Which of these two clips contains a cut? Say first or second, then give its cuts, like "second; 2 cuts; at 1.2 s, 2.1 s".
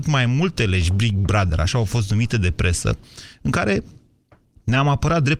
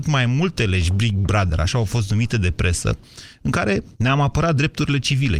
second; 1 cut; at 3.9 s